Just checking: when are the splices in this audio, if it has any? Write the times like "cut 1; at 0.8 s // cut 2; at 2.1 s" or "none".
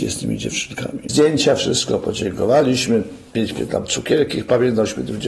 cut 1; at 1.1 s

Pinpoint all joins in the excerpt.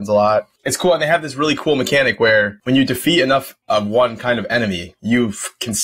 none

